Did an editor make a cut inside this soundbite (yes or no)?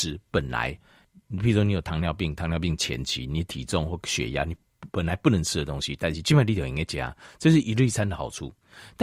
no